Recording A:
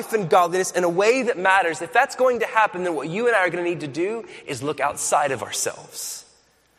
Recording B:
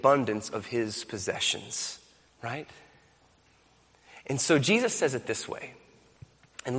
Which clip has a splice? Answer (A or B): B